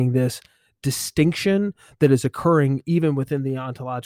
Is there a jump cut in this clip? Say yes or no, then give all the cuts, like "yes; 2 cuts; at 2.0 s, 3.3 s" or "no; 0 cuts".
no; 0 cuts